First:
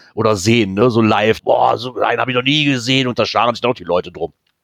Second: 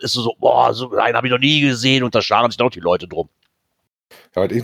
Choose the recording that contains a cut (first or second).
first